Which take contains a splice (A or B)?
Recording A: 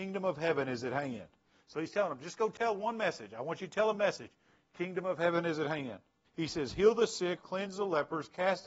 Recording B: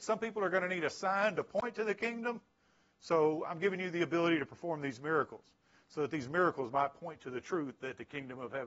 A